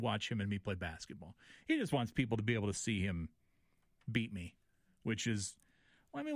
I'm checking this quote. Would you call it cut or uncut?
uncut